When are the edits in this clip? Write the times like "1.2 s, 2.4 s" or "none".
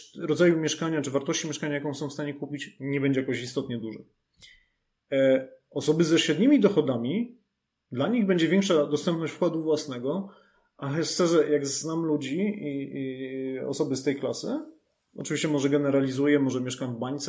none